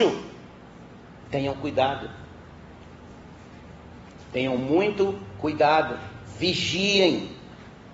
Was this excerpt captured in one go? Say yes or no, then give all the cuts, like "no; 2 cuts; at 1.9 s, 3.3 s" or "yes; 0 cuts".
no; 1 cut; at 1.2 s